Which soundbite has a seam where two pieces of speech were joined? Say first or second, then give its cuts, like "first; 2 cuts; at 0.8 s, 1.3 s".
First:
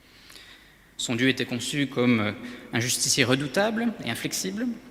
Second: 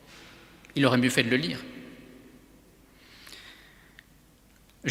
first; 1 cut; at 1.0 s